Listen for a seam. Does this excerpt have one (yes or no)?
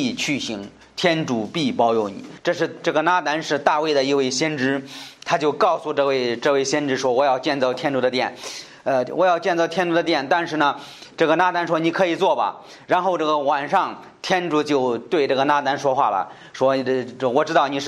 yes